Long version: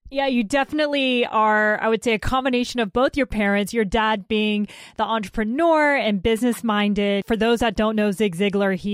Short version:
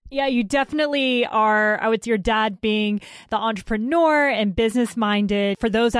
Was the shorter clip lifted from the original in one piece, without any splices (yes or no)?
no